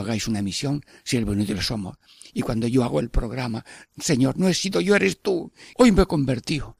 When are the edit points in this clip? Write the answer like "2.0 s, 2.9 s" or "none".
5.7 s